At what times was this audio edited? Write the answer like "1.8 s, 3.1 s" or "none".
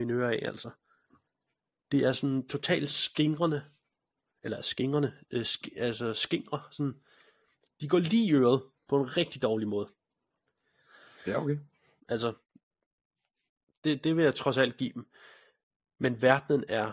12.0 s